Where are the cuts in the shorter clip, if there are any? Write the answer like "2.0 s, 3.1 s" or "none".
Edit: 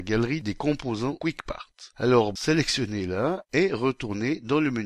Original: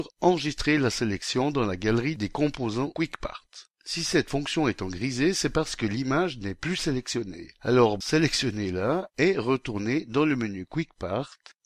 1.9 s